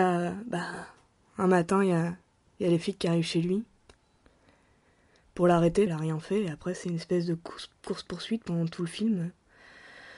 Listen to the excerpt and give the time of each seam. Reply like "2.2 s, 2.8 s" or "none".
5.9 s